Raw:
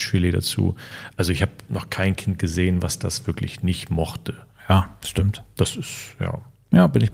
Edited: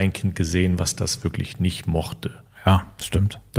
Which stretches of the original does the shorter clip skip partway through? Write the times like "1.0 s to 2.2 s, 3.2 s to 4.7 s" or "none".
none